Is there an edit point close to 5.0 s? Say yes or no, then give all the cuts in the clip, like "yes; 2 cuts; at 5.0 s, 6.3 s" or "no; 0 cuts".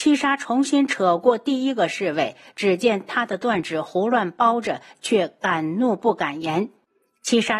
yes; 1 cut; at 5.0 s